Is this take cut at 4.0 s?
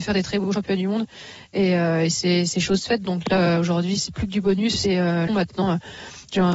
yes; 2 cuts; at 4.0 s, 5.3 s

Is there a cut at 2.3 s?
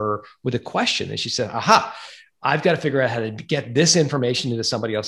no; 0 cuts

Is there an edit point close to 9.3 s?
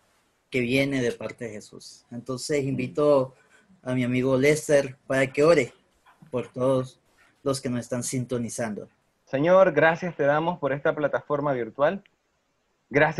yes; 1 cut; at 9.3 s

